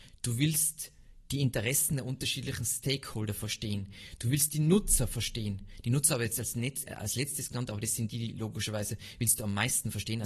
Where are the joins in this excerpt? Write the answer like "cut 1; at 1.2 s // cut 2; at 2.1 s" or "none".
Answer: cut 1; at 6.8 s